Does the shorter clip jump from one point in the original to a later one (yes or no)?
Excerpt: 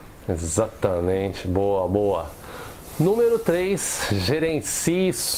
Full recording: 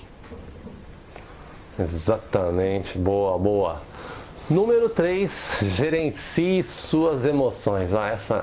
no